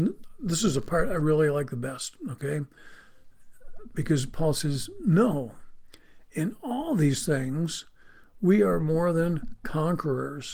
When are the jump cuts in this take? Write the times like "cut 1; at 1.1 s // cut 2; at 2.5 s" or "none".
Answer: none